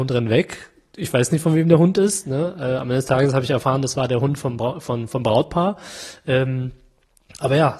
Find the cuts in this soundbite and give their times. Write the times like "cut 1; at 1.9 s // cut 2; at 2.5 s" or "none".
none